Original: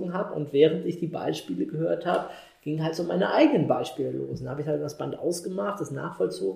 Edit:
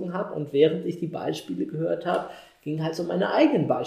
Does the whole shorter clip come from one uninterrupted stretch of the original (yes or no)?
yes